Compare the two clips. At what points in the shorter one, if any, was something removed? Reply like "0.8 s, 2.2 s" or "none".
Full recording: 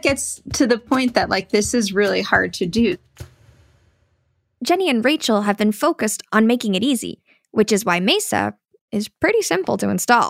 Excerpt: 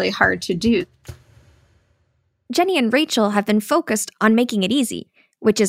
none